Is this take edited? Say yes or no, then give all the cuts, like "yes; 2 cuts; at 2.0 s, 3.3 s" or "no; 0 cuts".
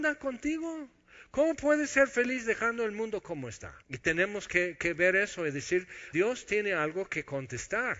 yes; 2 cuts; at 3.8 s, 6.1 s